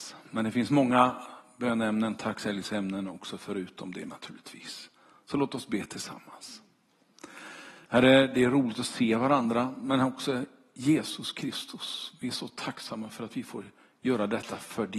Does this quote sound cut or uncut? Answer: cut